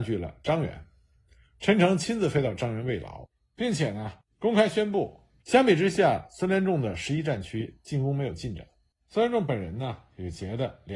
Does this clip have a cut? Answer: yes; 1 cut; at 5.4 s

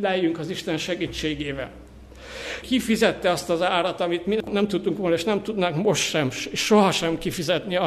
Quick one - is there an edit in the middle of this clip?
yes; 1 cut; at 2.6 s

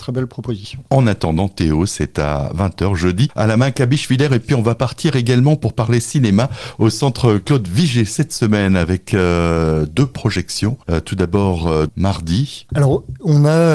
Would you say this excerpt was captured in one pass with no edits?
yes; 0 cuts

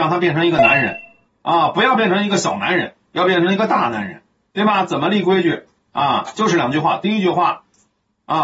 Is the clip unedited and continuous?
yes; 0 cuts

